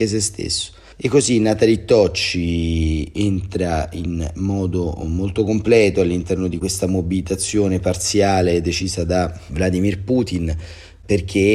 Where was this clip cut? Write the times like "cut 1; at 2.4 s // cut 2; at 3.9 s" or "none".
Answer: cut 1; at 0.9 s